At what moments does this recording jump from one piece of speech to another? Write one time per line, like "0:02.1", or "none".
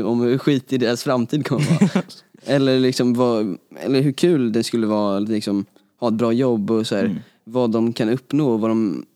none